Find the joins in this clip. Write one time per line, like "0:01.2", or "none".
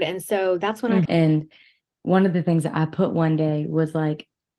0:01.1